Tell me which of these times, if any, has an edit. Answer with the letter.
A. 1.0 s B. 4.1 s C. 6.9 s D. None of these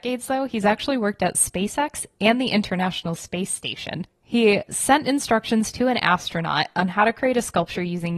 B